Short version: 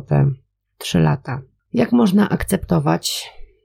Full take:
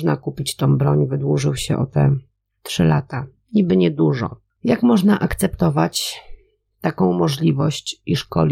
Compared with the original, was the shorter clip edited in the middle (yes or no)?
yes